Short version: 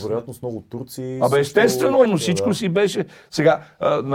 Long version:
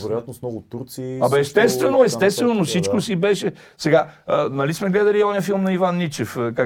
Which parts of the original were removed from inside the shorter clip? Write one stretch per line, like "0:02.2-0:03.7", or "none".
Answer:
0:02.1-0:02.5

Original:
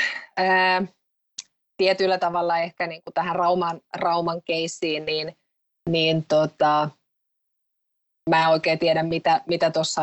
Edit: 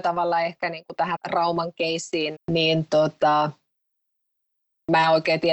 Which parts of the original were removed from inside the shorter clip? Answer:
0:03.3-0:03.8
0:05.1-0:05.7

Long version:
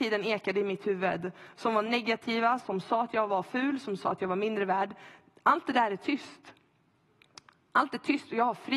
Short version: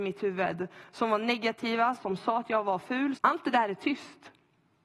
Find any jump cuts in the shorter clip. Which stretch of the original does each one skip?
0:03.8-0:05.4

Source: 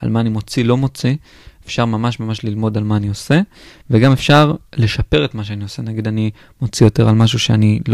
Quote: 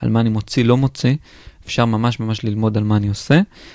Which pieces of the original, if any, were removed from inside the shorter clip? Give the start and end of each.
none

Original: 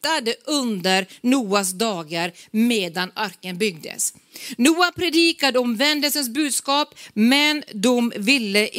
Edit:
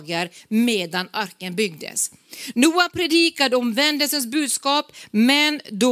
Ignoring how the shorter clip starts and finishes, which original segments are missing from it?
none

